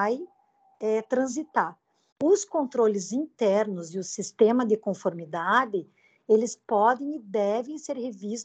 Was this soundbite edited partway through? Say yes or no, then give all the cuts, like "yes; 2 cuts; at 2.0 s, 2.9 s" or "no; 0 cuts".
yes; 1 cut; at 2.1 s